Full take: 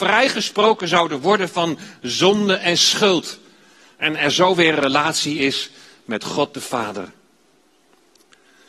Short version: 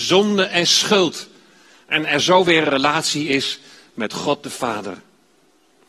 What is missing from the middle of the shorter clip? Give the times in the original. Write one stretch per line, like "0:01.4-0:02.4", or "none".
none